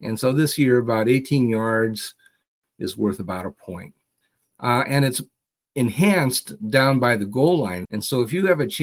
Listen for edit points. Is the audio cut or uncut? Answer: cut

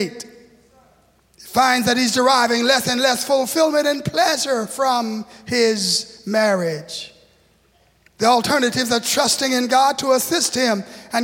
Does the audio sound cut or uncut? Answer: uncut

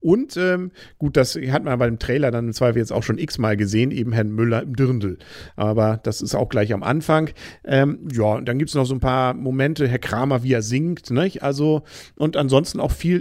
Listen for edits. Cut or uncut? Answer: uncut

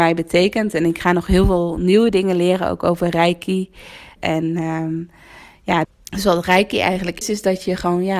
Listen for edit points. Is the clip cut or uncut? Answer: cut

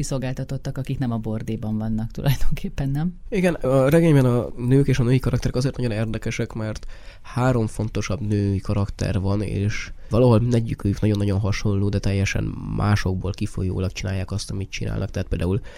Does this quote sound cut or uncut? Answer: uncut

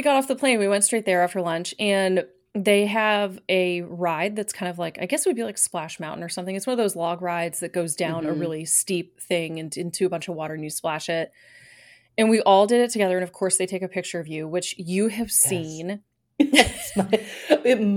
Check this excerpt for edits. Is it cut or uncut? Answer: uncut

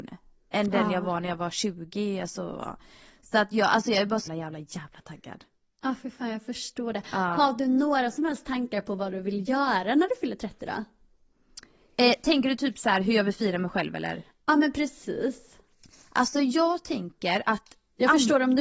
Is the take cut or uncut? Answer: cut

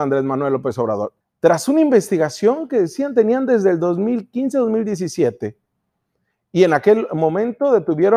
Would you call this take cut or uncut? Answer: cut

